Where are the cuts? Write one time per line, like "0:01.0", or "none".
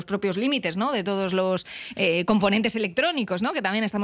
none

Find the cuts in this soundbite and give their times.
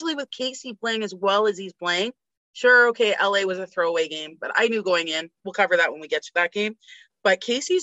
none

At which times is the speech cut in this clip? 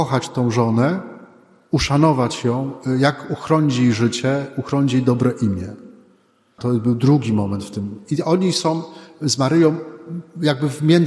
0:06.6

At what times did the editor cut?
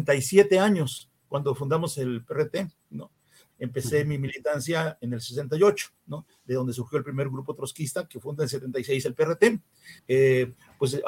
0:03.5
0:10.0

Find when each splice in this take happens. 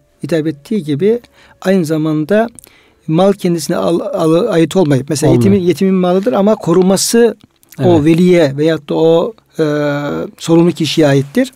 none

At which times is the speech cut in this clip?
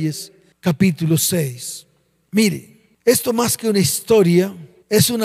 none

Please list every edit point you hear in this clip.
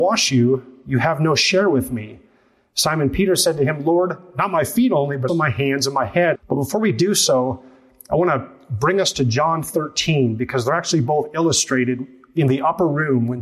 0:05.3
0:06.3

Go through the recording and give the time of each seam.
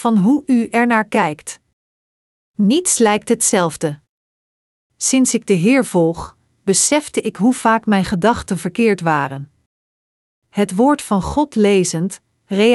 0:04.9

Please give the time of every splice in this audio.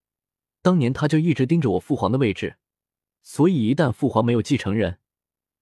none

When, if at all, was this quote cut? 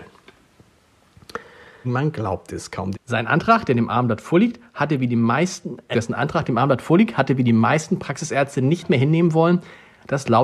0:01.8
0:02.9
0:05.9

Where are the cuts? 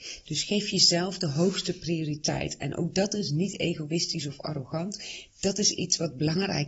none

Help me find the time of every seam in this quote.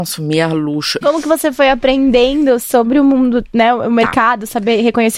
0:01.0

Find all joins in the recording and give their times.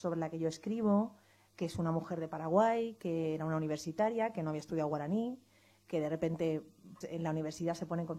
0:07.0

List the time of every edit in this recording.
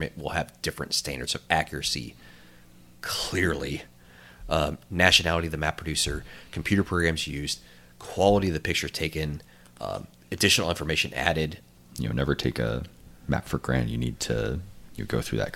0:11.8

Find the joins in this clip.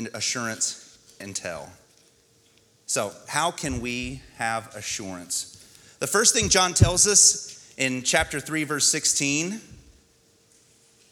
none

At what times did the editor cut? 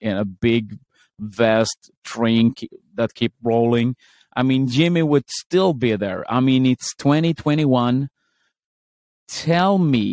none

